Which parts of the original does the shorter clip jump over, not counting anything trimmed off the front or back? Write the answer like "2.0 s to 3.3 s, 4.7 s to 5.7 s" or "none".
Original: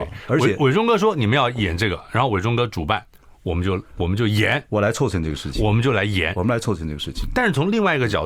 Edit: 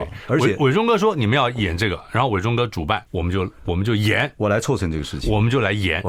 3.1 s to 3.4 s